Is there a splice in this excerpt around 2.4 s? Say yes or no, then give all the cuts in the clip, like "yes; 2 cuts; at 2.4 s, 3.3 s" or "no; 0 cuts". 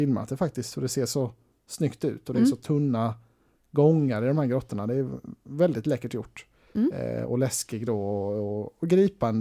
no; 0 cuts